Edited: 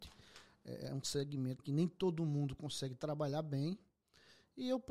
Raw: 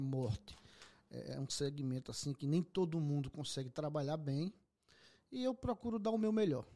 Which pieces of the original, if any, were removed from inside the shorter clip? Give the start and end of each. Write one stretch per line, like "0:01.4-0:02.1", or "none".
0:02.0-0:02.3